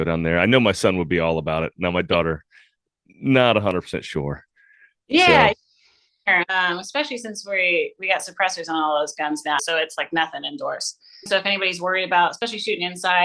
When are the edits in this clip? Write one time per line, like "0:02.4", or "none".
0:09.6
0:11.3